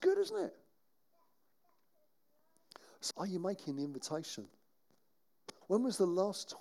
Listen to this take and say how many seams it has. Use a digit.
2